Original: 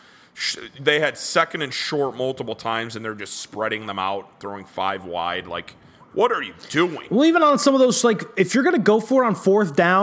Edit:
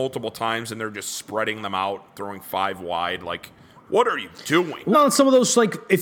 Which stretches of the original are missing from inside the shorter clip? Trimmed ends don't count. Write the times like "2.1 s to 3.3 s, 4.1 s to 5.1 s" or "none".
7.2 s to 7.4 s